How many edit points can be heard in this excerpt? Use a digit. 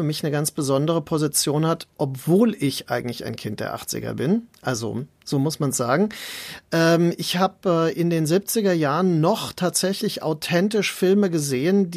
0